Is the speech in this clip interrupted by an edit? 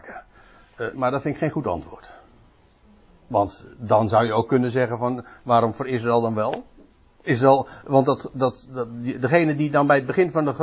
yes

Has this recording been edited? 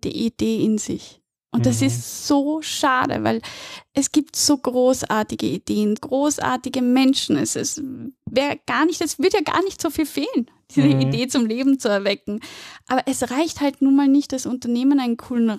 yes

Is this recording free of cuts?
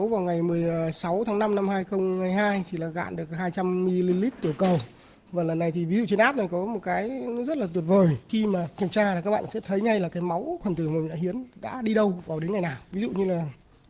yes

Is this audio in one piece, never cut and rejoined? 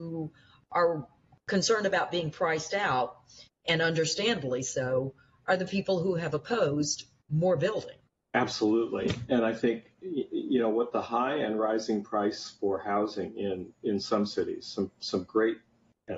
yes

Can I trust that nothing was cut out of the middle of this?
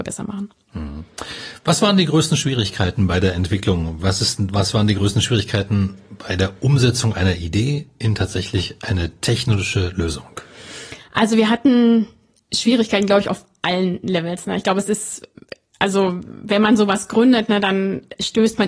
yes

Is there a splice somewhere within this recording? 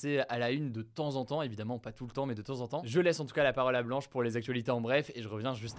no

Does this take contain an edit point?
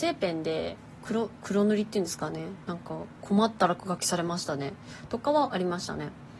no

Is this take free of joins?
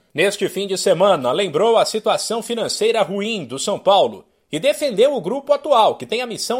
yes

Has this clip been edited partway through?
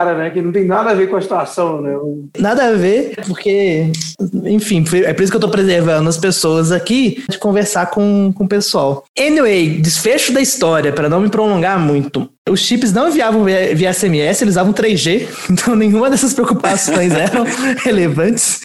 yes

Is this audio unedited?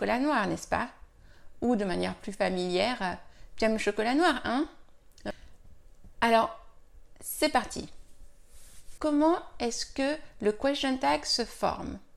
no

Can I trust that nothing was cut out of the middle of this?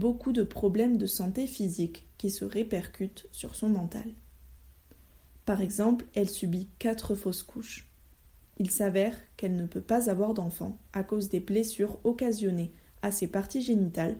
yes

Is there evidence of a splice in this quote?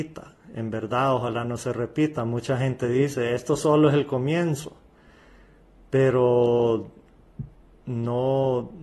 no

